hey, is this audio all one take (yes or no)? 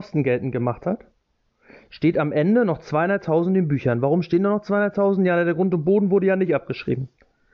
yes